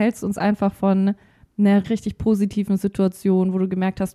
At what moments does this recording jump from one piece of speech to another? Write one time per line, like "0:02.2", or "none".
0:01.8